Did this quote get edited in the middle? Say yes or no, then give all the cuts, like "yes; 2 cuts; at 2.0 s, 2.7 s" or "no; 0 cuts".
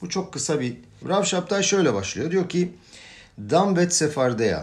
yes; 1 cut; at 1.0 s